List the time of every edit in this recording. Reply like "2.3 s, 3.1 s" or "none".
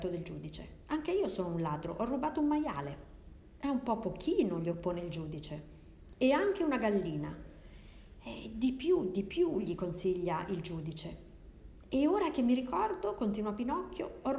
none